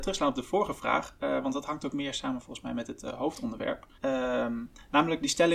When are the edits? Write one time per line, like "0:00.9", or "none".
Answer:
0:03.9